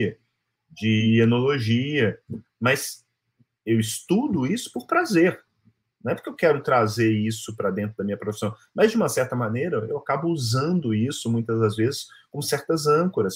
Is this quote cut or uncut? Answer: uncut